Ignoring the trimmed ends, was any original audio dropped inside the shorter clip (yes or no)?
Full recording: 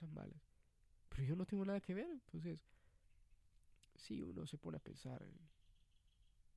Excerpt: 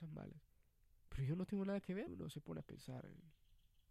yes